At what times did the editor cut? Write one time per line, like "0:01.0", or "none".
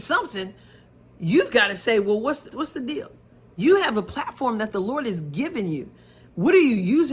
0:02.5